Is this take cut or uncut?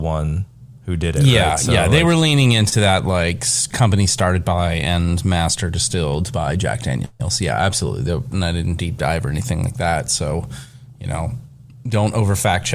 cut